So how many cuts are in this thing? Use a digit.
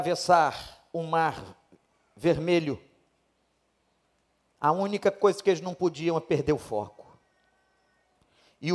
0